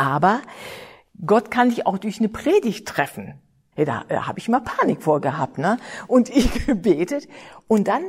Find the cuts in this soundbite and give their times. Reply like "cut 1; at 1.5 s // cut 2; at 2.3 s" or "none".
cut 1; at 3.7 s